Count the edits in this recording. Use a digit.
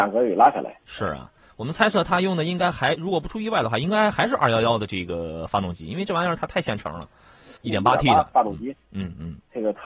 1